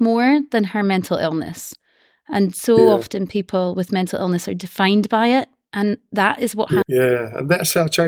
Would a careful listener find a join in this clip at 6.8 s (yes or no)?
yes